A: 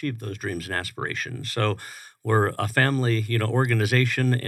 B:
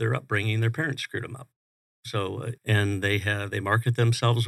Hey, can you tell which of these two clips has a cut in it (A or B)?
B